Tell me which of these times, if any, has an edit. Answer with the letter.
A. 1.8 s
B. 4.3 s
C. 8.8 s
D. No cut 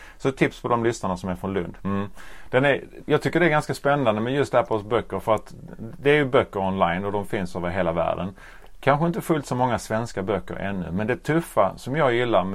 A